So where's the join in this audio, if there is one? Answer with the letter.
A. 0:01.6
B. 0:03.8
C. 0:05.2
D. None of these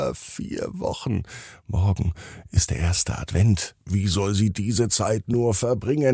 B